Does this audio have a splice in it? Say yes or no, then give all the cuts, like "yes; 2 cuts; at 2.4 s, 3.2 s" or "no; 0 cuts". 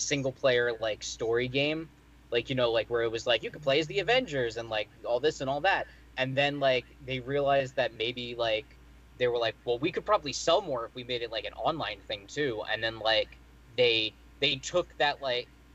no; 0 cuts